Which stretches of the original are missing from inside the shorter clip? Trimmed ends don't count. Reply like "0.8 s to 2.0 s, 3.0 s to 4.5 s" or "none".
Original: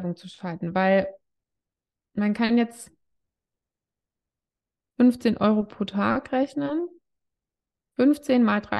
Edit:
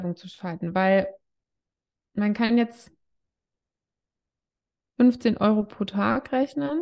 none